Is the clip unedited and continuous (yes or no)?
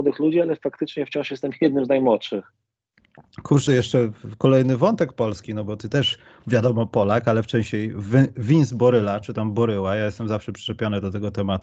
no